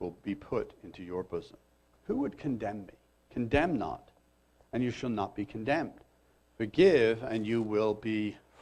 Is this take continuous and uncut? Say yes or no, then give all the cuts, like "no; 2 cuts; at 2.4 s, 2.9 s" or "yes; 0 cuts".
no; 2 cuts; at 1.9 s, 3.1 s